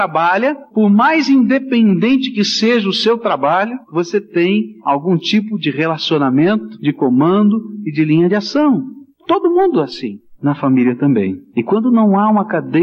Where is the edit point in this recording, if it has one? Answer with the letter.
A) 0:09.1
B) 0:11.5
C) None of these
B